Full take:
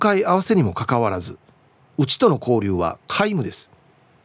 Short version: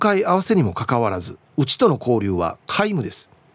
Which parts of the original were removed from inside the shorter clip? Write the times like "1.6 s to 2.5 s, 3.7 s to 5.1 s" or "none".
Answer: 1.5 s to 1.9 s